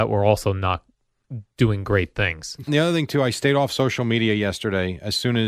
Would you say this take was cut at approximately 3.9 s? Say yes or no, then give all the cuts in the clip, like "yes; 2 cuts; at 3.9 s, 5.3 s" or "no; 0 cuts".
no; 1 cut; at 2.7 s